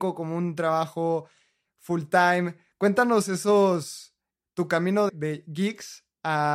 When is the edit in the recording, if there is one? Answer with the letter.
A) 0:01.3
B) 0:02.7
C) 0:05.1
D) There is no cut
C